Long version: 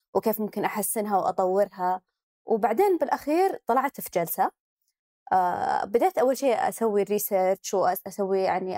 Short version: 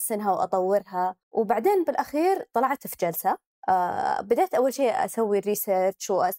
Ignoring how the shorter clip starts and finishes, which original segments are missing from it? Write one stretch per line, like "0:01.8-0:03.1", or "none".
0:02.1-0:02.3
0:04.7-0:05.2